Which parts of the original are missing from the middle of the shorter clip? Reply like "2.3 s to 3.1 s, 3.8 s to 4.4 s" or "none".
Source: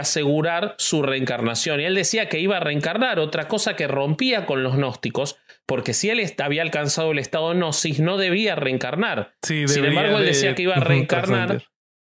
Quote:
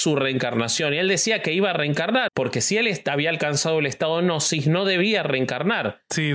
3.1 s to 5.6 s